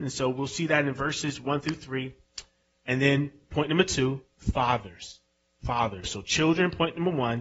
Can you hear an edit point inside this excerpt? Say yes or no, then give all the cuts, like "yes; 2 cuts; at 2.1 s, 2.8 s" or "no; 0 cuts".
yes; 1 cut; at 6.0 s